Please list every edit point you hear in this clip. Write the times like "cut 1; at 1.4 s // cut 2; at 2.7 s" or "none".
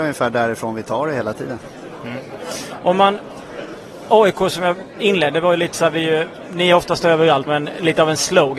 cut 1; at 7.5 s